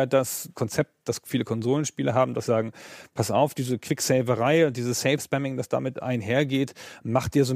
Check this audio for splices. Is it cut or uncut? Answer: cut